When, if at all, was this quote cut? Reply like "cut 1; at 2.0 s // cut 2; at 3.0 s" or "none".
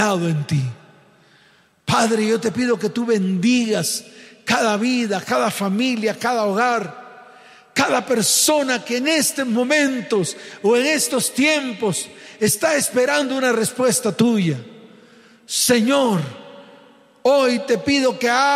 none